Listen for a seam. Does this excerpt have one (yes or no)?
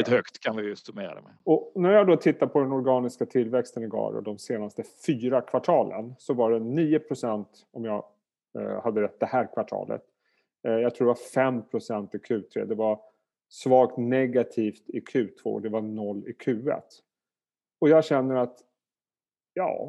no